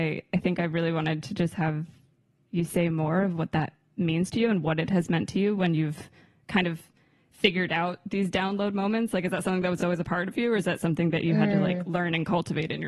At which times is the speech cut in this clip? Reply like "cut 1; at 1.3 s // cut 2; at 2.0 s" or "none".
none